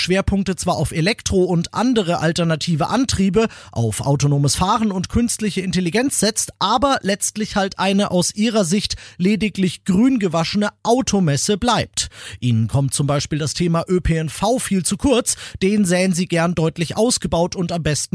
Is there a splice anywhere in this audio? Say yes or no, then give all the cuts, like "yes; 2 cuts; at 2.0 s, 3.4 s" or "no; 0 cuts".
no; 0 cuts